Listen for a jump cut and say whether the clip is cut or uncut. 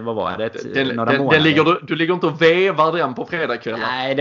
uncut